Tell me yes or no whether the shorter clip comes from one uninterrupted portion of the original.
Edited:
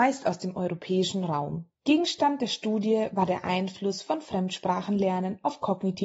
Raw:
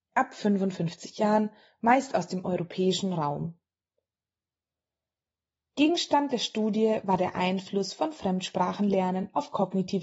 no